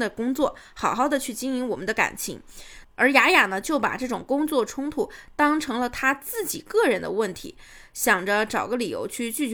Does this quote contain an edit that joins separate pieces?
yes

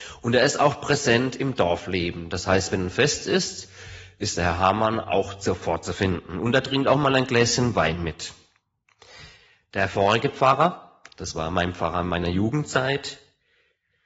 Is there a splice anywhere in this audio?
no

